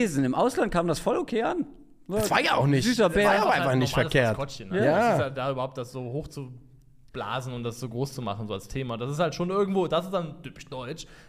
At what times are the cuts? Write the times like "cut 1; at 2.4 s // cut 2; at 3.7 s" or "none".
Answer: none